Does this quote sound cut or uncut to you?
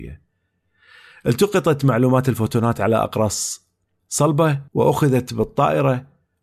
cut